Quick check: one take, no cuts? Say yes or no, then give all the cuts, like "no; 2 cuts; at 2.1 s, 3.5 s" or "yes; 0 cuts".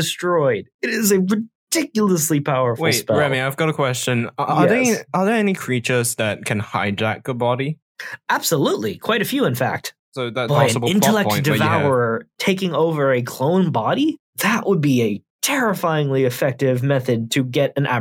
no; 1 cut; at 10.5 s